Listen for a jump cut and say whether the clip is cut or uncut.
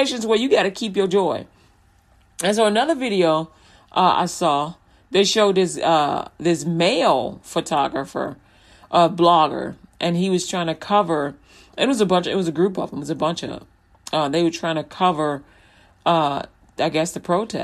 uncut